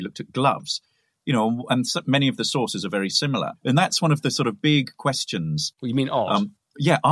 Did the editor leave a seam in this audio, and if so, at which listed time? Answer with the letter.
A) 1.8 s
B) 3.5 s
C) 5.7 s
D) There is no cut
B